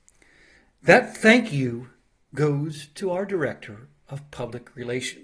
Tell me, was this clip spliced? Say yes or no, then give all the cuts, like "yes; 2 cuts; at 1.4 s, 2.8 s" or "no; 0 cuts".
no; 0 cuts